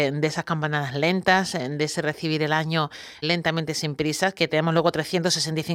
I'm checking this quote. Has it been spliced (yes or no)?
yes